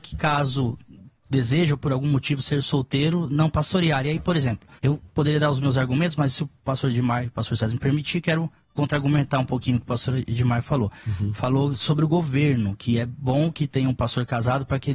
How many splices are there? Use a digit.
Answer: 1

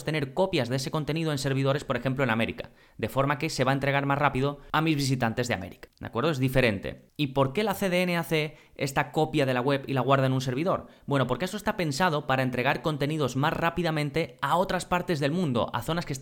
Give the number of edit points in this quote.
1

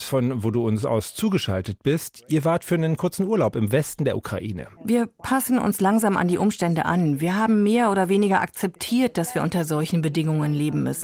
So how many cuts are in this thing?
1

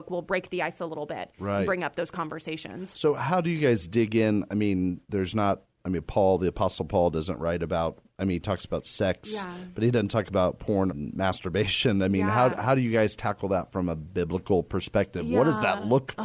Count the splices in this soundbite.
1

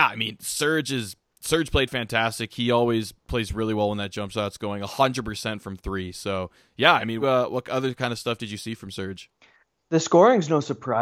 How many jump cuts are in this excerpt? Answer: 1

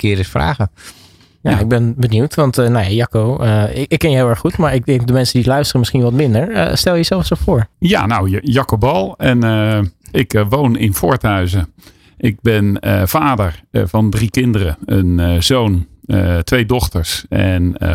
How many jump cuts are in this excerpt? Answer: 1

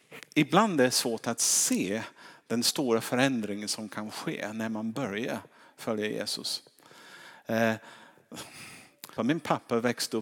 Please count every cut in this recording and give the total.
1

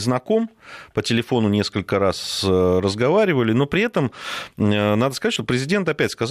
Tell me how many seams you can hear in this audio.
0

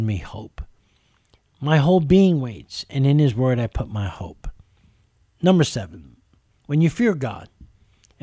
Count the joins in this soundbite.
1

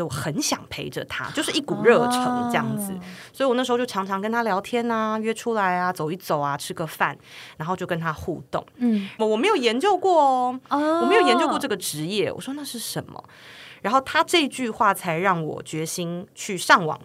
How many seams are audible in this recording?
1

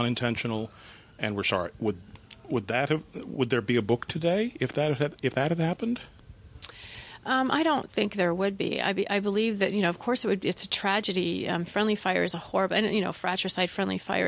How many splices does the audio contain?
0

